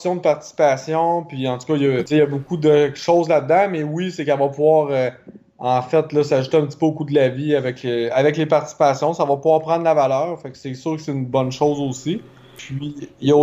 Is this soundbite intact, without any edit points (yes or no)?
yes